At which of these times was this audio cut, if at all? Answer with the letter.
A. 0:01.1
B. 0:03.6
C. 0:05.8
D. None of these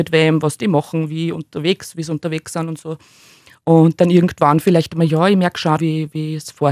C